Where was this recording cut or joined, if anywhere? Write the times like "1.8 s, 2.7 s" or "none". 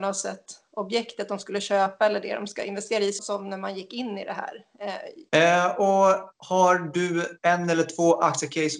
3.2 s, 5.3 s